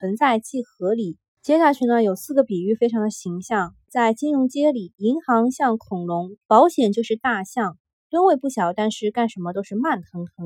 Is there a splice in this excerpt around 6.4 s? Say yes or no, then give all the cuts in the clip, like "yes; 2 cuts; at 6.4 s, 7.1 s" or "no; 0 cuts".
yes; 2 cuts; at 3.9 s, 6.4 s